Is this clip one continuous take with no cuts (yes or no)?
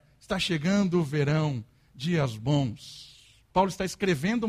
no